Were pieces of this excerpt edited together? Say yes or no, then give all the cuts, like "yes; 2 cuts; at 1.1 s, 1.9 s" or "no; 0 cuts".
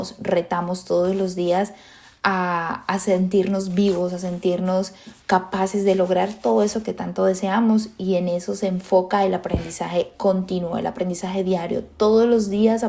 no; 0 cuts